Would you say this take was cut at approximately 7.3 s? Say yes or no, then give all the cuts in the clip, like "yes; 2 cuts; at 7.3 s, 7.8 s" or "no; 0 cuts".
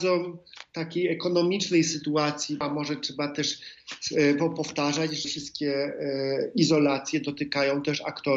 no; 2 cuts; at 2.6 s, 5.2 s